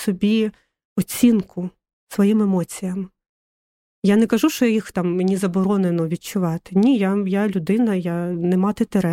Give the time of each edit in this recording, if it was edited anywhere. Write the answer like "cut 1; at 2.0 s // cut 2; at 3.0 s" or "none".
none